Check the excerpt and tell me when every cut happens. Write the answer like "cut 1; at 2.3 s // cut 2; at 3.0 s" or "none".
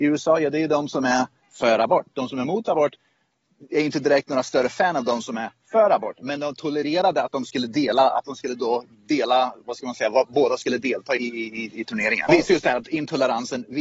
cut 1; at 11.2 s // cut 2; at 12.3 s